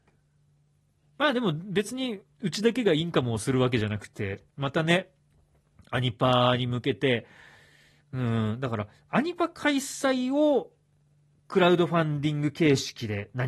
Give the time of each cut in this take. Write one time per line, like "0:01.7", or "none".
0:01.0
0:04.5